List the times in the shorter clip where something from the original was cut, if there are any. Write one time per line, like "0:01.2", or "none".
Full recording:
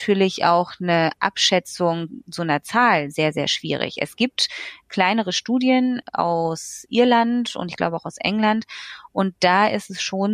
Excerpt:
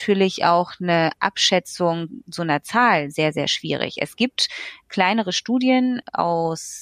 none